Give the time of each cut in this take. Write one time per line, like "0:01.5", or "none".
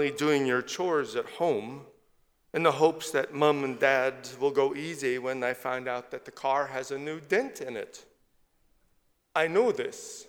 none